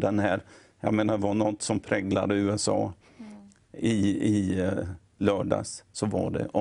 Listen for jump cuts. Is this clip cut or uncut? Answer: uncut